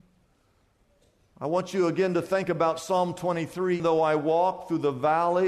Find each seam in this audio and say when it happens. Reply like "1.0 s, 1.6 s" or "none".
3.8 s